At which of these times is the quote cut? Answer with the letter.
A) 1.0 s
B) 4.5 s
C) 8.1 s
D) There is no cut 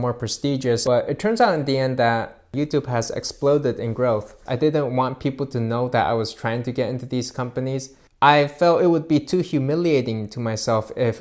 B